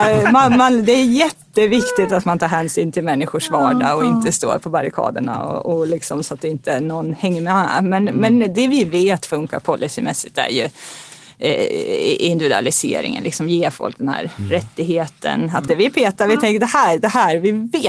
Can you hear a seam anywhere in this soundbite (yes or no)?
yes